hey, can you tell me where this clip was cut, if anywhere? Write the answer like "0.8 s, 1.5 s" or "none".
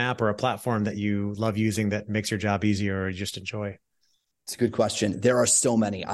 none